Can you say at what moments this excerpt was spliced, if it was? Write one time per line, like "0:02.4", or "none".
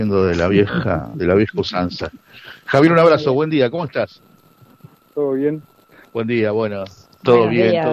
0:04.9